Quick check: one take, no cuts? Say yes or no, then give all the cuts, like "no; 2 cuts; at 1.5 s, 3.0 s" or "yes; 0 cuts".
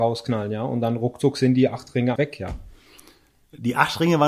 no; 1 cut; at 2.2 s